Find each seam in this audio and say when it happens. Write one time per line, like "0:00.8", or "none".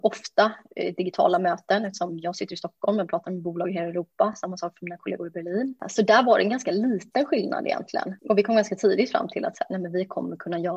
none